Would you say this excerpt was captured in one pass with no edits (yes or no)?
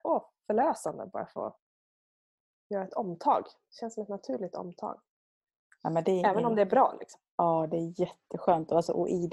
yes